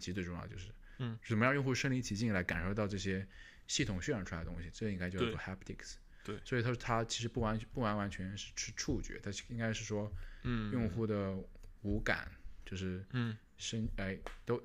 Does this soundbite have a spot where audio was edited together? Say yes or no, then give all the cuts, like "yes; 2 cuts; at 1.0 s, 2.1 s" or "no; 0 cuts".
no; 0 cuts